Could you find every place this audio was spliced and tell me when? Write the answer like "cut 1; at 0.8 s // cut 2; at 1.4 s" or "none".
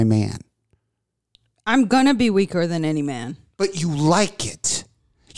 none